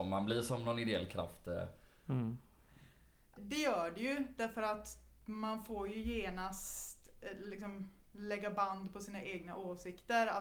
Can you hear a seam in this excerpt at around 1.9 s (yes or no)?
no